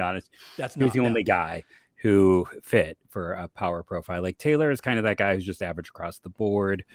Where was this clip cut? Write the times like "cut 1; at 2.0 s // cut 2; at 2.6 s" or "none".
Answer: none